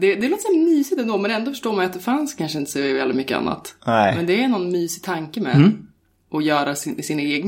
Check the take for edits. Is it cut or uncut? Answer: uncut